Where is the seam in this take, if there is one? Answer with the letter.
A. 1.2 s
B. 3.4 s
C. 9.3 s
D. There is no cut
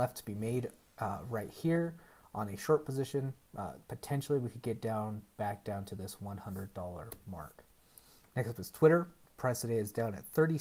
D